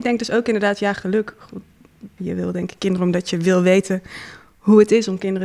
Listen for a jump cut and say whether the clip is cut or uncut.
cut